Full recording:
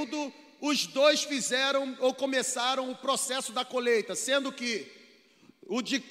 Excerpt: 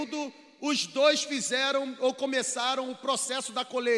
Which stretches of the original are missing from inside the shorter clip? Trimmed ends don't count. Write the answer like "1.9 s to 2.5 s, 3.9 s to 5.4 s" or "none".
none